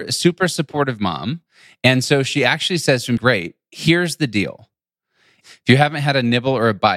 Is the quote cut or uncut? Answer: cut